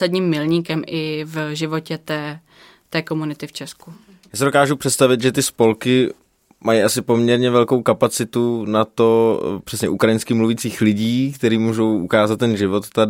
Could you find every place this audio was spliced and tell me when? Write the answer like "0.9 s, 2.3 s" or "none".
none